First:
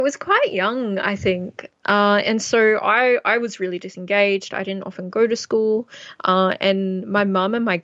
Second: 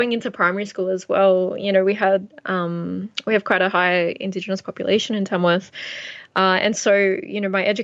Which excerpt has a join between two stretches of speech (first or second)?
first